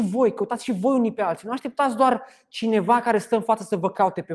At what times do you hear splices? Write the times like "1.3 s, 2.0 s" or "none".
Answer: none